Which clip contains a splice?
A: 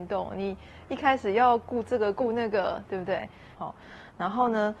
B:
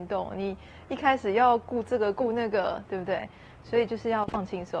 A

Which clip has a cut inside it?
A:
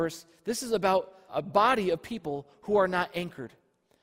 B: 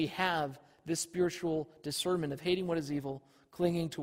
A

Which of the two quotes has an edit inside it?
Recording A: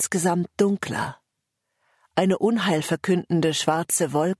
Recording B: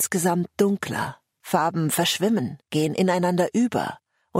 B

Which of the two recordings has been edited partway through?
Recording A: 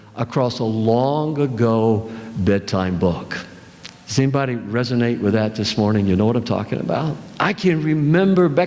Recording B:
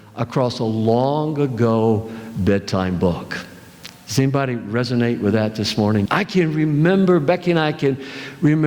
B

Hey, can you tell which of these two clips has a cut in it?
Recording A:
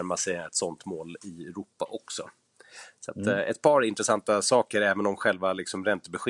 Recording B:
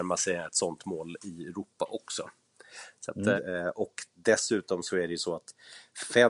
B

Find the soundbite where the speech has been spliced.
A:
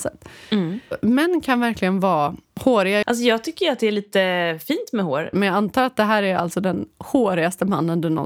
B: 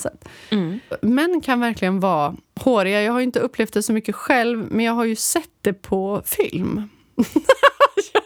A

